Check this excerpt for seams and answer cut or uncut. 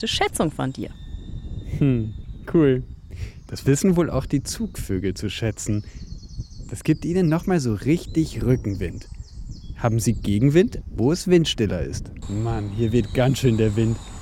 cut